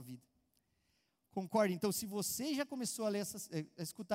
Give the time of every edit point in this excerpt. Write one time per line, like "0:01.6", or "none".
none